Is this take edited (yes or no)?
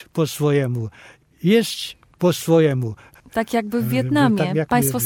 yes